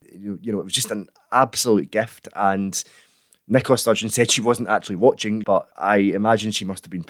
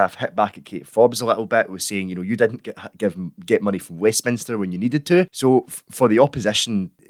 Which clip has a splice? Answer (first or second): first